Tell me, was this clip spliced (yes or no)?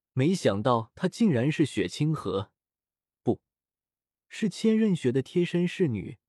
no